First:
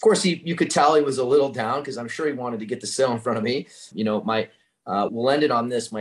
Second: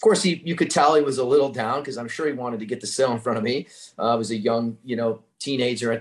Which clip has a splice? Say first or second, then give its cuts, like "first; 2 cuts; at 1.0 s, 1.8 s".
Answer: first; 2 cuts; at 3.9 s, 5.1 s